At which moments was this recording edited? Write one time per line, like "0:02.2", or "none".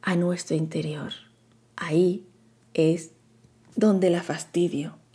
0:01.7

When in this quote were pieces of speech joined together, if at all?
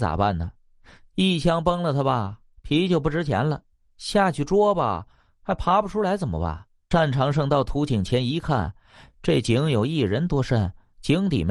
0:06.9

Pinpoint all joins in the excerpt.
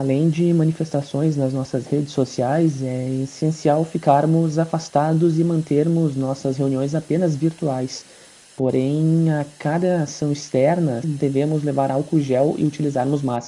0:11.0

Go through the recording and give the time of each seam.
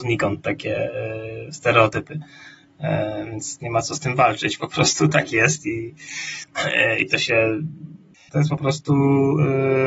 0:08.3

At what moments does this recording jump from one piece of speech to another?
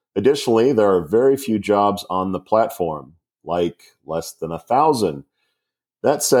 none

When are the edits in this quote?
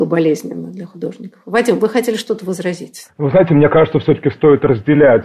none

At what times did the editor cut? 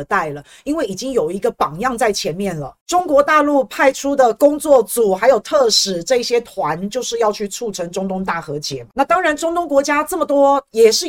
none

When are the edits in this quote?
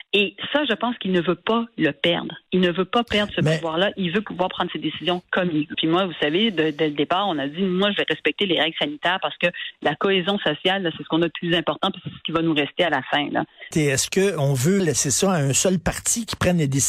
0:05.7
0:13.7
0:14.8

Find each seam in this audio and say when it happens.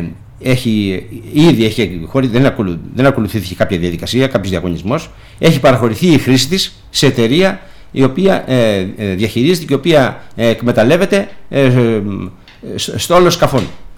none

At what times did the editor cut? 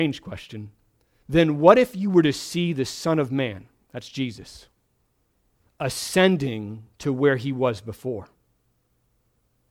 0:01.2
0:06.9

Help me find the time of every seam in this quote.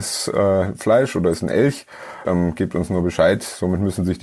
0:02.2

